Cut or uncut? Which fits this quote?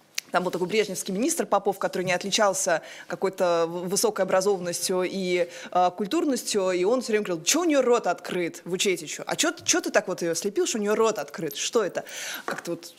uncut